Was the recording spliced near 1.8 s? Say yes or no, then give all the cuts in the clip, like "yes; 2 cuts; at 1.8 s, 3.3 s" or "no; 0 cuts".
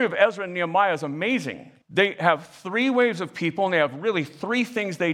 yes; 1 cut; at 1.8 s